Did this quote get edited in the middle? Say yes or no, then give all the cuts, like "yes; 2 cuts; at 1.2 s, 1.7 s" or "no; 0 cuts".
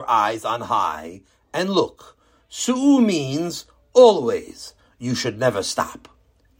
no; 0 cuts